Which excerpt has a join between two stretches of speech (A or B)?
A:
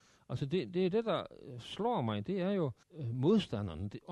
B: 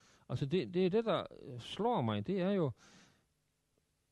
A